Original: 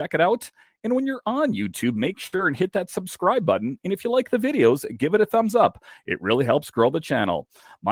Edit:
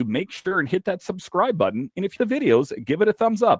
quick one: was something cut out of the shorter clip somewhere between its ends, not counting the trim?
yes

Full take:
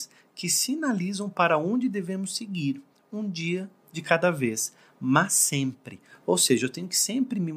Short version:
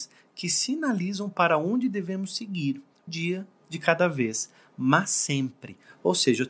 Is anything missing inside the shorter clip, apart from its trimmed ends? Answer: yes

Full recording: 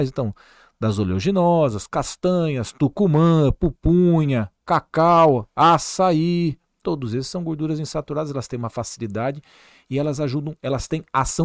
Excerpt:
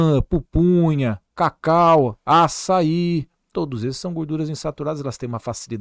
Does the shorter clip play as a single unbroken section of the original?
yes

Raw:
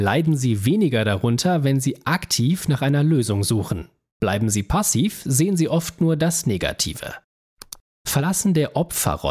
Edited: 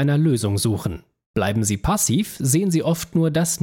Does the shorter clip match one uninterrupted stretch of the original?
yes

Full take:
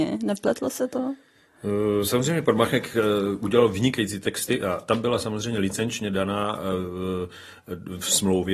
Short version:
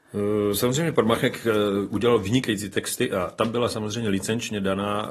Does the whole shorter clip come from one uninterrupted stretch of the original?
yes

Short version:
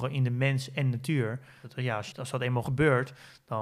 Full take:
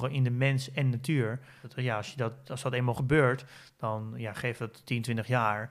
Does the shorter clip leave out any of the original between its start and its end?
yes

